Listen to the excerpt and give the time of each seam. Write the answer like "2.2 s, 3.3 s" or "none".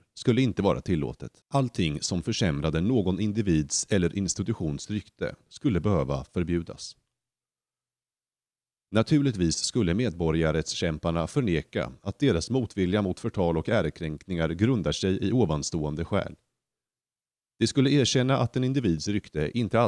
1.4 s